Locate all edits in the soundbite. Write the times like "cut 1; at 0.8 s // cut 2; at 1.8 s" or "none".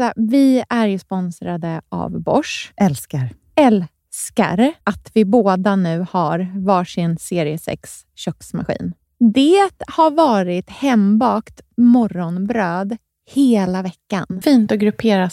cut 1; at 4.8 s // cut 2; at 14.4 s